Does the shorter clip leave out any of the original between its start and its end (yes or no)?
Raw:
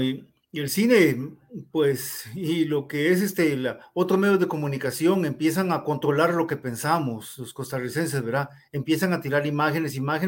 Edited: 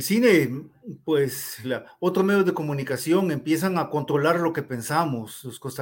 yes